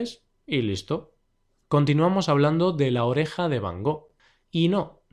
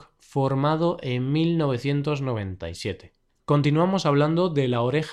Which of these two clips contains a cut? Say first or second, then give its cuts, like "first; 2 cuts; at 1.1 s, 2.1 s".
second; 1 cut; at 3.4 s